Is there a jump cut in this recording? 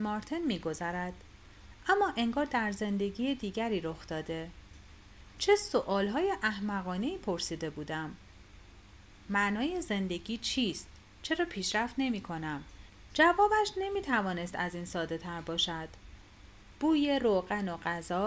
yes; 2 cuts; at 13.1 s, 16.7 s

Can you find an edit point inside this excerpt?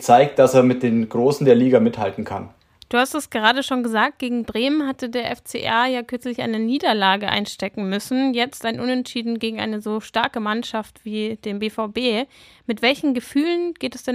no; 0 cuts

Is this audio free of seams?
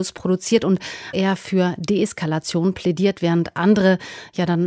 no; 1 cut; at 1.1 s

